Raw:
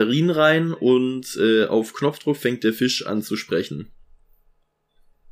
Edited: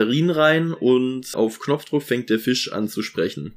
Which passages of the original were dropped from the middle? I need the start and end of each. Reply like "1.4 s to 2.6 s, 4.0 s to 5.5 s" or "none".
1.3 s to 1.7 s